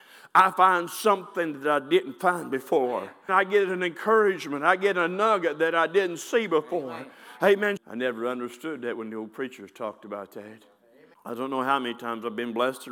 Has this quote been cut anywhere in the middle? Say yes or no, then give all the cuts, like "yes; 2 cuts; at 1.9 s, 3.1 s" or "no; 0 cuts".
yes; 3 cuts; at 3.3 s, 7.8 s, 11.1 s